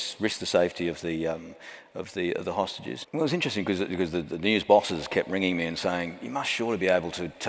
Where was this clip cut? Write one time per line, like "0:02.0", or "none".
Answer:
0:03.0